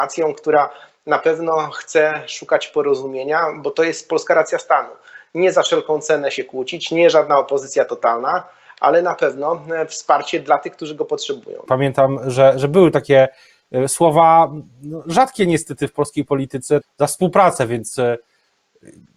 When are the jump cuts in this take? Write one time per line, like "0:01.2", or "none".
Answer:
0:11.7
0:16.8